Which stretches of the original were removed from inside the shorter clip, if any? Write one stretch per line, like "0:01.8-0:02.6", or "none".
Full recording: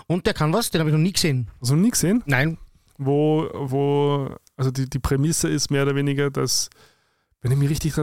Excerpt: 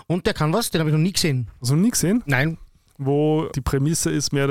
0:03.5-0:04.9